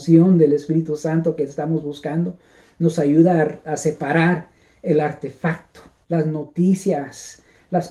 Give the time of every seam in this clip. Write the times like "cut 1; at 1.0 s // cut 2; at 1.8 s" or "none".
cut 1; at 6.0 s